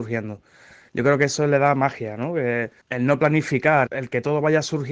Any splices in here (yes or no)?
yes